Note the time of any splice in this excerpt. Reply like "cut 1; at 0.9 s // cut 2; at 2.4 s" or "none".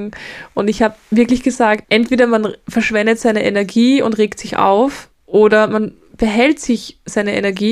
cut 1; at 1.8 s